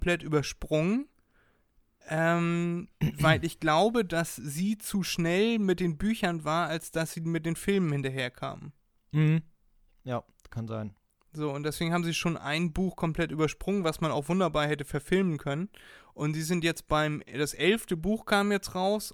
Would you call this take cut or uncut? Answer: uncut